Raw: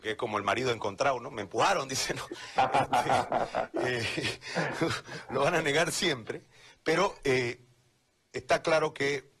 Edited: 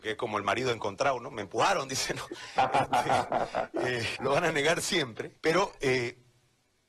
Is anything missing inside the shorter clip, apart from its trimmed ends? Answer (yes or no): yes